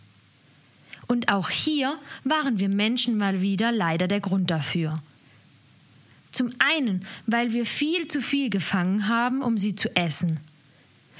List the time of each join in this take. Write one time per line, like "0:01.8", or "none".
none